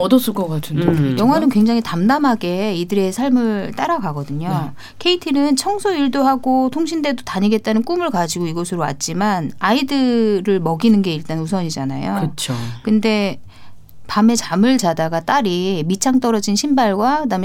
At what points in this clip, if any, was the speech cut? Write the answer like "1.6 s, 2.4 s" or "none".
none